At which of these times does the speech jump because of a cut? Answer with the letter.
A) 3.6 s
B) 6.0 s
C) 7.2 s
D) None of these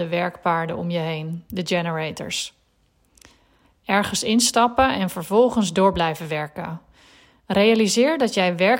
A